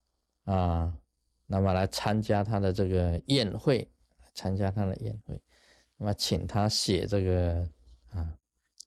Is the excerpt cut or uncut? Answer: uncut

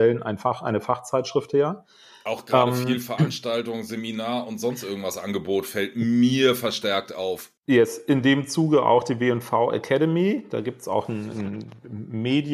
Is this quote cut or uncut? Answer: cut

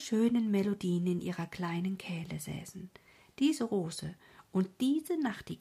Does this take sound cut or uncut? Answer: uncut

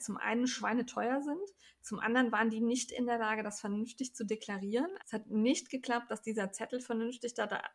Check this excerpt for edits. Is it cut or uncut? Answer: cut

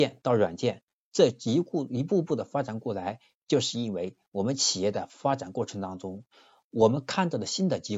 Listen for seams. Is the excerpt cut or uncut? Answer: uncut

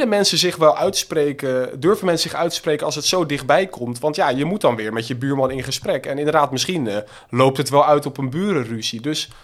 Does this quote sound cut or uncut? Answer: uncut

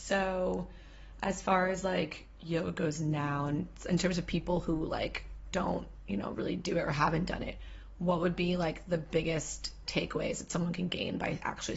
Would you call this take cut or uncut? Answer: uncut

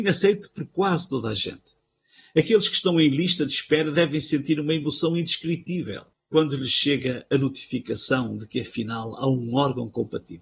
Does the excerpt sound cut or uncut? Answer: uncut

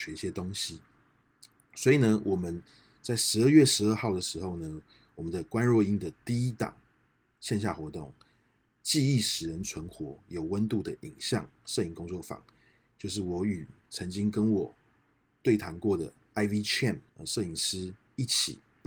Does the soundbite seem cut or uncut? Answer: cut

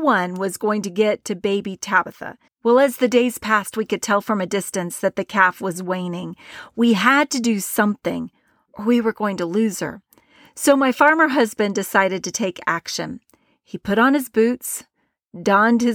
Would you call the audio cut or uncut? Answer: cut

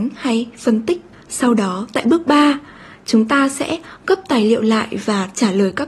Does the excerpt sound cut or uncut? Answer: uncut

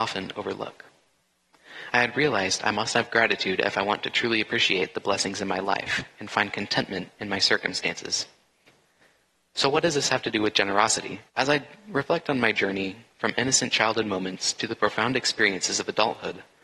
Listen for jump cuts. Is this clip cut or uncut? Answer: cut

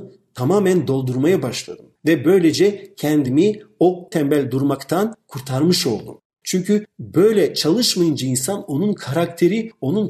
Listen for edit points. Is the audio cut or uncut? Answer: cut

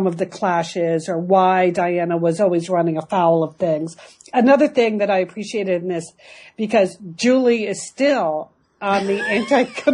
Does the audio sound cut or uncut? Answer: uncut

